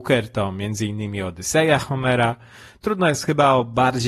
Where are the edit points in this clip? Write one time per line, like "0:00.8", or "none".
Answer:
none